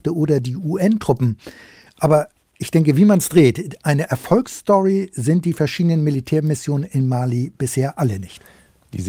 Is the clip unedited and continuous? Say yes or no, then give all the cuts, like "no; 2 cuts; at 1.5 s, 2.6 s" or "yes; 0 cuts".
yes; 0 cuts